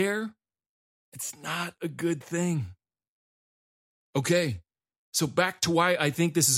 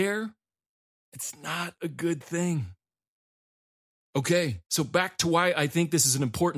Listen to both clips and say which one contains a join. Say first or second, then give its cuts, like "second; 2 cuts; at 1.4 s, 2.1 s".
second; 1 cut; at 4.6 s